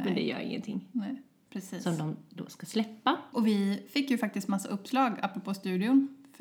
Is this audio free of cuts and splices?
no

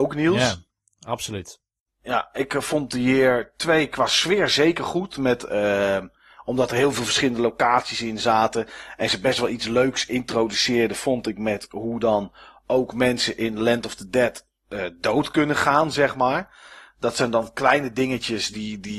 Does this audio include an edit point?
no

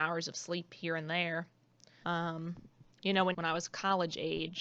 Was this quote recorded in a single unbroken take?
no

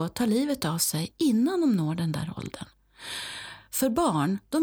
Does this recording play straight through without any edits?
yes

